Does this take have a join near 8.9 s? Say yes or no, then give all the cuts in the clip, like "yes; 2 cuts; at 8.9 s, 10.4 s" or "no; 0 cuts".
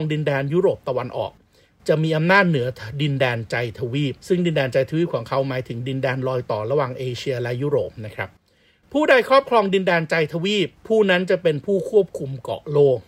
no; 2 cuts; at 4.2 s, 10.8 s